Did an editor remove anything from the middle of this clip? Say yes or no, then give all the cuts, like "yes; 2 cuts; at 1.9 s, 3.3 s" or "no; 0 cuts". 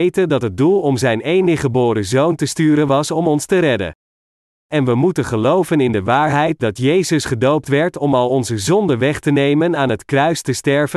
no; 0 cuts